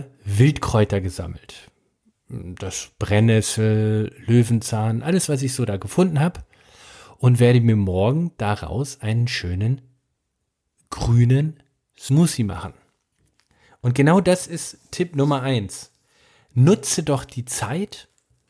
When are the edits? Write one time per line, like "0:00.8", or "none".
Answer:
none